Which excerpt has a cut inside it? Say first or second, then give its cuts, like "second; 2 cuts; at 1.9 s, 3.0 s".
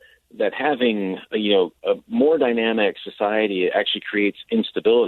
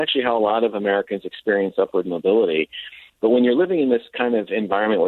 second; 1 cut; at 3.1 s